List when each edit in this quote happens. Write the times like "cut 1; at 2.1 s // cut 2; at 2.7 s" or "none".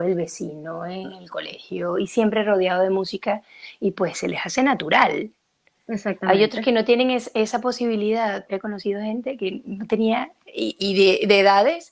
cut 1; at 8.5 s